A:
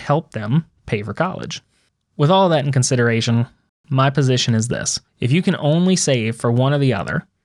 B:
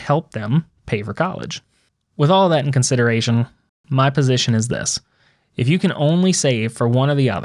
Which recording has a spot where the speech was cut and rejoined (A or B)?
A